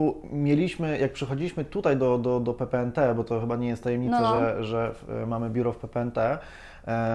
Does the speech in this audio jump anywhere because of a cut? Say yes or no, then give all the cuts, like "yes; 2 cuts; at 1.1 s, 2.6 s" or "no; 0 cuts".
no; 0 cuts